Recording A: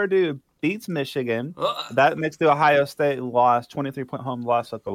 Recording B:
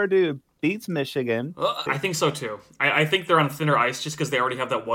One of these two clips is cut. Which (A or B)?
B